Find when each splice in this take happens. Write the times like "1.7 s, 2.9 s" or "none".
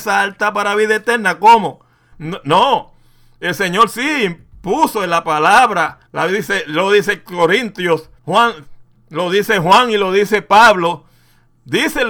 2.1 s, 6.1 s, 8.2 s